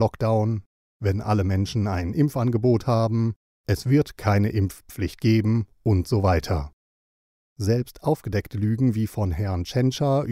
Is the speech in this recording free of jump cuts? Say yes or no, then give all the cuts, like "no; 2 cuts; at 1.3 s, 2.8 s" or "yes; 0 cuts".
yes; 0 cuts